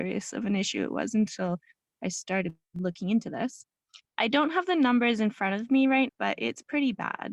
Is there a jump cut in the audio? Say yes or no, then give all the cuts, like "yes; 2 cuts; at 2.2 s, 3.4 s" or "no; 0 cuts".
yes; 2 cuts; at 4.0 s, 6.1 s